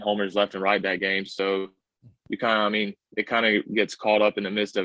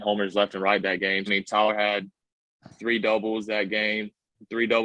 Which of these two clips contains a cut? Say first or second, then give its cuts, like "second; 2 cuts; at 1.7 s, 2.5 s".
second; 1 cut; at 1.3 s